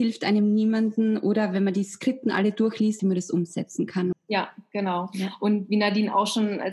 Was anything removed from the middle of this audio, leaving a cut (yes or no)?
yes